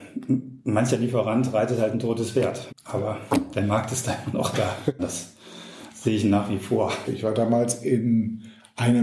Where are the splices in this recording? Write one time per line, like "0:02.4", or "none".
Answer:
0:02.7
0:05.0
0:07.0